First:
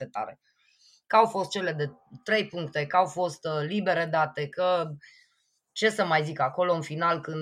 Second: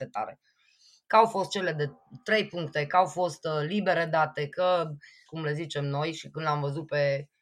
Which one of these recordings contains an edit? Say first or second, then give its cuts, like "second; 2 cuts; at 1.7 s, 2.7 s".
second; 1 cut; at 5.3 s